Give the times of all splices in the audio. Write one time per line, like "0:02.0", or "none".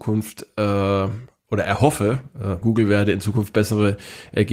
0:02.6